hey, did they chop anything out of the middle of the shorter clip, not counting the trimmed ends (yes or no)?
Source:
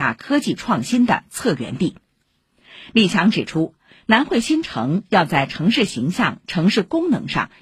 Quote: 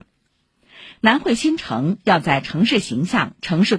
yes